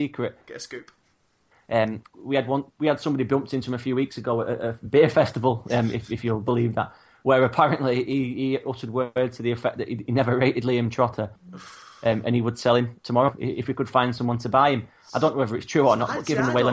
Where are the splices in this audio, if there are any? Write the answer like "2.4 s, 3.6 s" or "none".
none